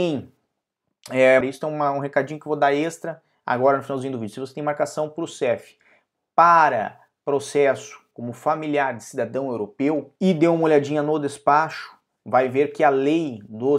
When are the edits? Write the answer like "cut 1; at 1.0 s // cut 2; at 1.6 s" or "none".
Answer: cut 1; at 1.4 s // cut 2; at 10.2 s